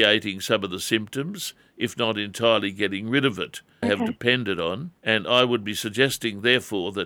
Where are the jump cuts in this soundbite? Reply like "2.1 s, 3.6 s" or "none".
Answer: 3.8 s, 5.0 s